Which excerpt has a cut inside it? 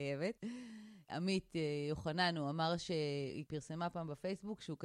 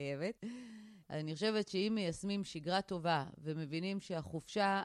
second; 1 cut; at 1.0 s

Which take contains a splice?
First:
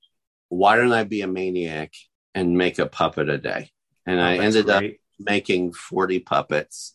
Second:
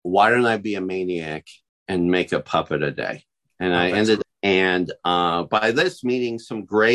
second; 1 cut; at 4.2 s

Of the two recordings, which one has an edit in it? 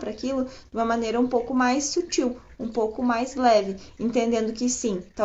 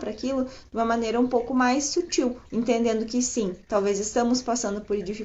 second; 1 cut; at 2.4 s

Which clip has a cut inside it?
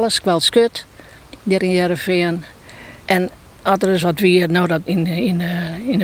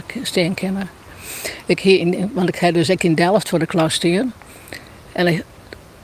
first; 2 cuts; at 3.0 s, 4.9 s

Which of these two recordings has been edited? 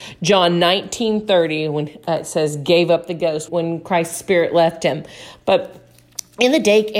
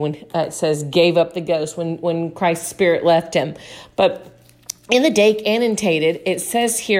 first; 1 cut; at 3.5 s

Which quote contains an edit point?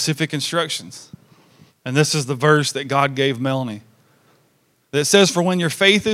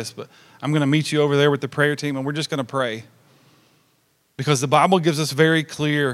first; 1 cut; at 1.7 s

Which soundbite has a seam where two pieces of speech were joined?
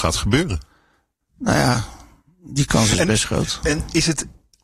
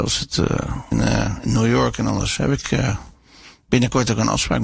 second; 1 cut; at 0.9 s

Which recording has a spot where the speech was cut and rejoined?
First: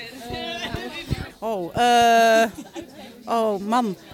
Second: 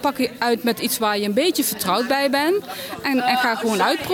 first; 1 cut; at 1.3 s

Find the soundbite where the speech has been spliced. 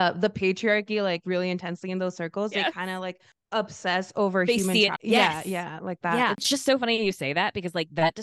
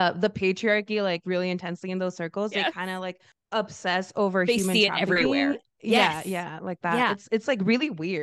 first; 2 cuts; at 5.0 s, 6.3 s

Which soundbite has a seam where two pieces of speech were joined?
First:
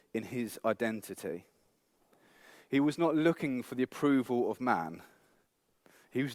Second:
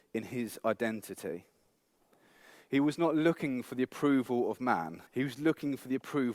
second; 1 cut; at 5.1 s

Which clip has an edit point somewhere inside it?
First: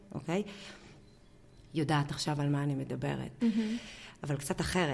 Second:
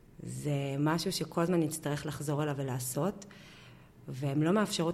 first; 1 cut; at 3.4 s

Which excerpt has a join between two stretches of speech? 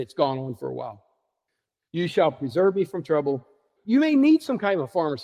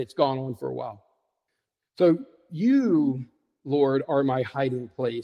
first; 2 cuts; at 1.9 s, 3.8 s

